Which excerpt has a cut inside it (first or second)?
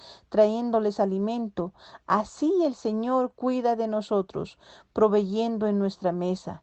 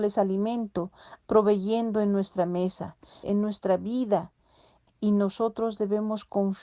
second